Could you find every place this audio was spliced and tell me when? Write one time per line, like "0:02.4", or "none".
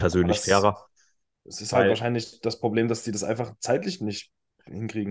none